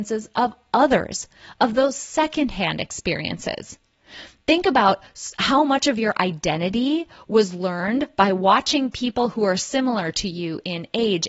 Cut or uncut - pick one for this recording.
uncut